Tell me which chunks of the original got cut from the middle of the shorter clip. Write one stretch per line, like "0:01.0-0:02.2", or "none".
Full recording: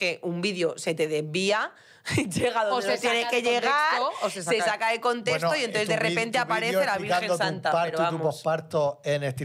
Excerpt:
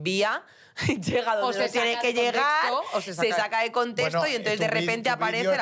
none